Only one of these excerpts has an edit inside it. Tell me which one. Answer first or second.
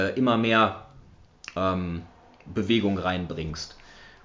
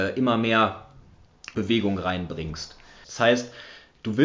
second